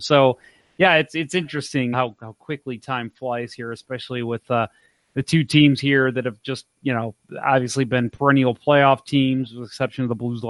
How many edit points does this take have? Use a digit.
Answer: 1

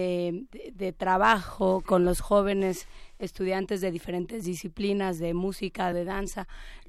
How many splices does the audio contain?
2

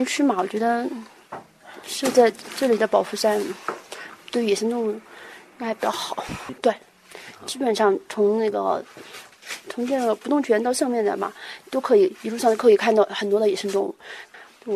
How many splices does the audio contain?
1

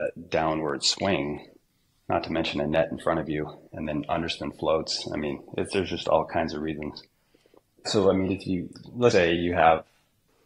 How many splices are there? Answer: 2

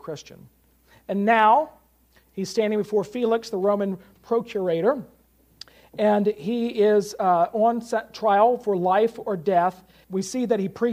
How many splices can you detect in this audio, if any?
1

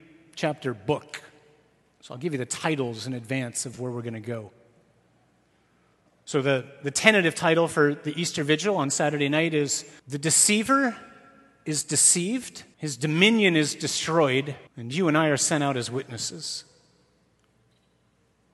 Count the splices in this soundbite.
3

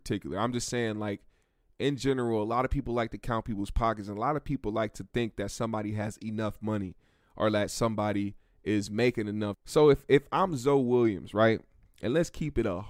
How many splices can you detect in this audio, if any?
1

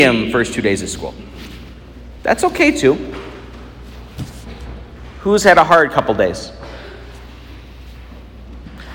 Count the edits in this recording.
1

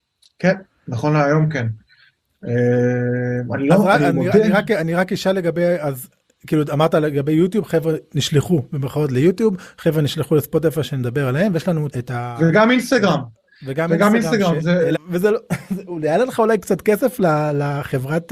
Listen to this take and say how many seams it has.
2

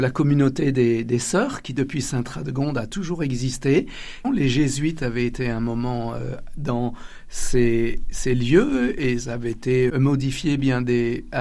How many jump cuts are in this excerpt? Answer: 2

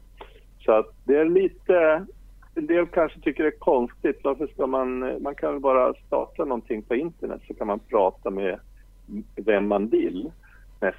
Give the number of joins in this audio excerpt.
0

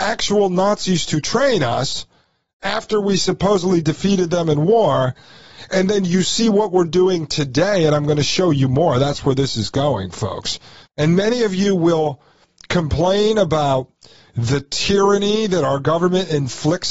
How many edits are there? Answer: 1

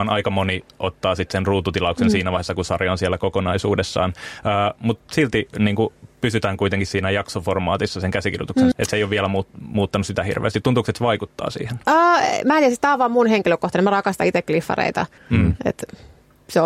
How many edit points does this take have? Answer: 2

